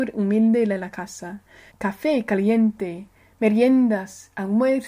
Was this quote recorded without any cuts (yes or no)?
no